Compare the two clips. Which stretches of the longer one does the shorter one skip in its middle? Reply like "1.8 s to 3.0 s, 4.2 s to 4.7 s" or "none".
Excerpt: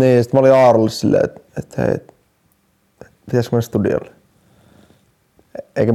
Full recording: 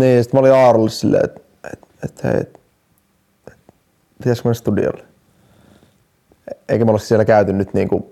1.5 s to 1.9 s, 3.7 s to 4.1 s